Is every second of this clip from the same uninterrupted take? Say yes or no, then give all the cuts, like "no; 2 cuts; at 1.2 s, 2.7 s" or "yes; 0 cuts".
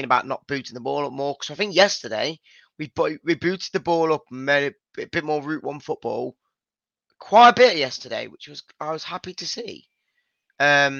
yes; 0 cuts